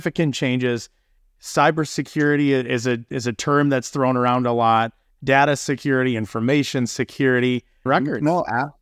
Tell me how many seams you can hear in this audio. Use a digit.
1